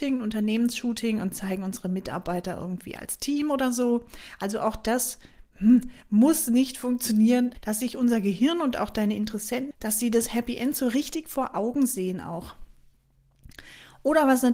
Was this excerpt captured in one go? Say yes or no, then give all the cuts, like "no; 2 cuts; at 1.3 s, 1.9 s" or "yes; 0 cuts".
no; 2 cuts; at 7.5 s, 9.7 s